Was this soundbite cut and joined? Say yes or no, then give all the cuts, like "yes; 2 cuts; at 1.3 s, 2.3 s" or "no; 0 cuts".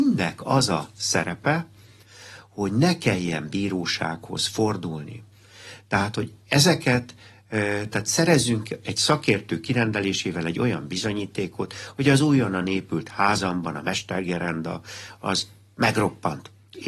no; 0 cuts